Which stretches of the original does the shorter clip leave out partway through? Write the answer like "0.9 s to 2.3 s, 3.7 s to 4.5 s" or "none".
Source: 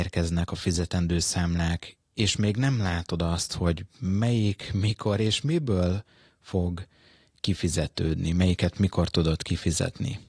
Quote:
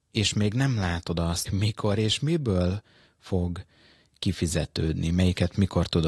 3.5 s to 4.7 s